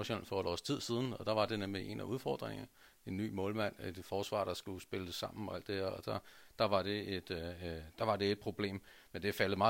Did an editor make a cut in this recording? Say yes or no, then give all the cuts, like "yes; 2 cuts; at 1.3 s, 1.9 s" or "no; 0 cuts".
no; 0 cuts